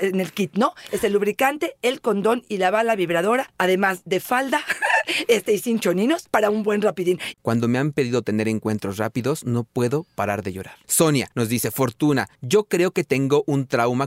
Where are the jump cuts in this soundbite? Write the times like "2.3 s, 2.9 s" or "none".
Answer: 7.3 s, 10.8 s